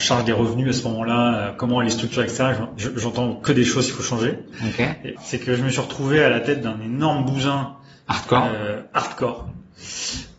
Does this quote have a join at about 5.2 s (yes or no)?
yes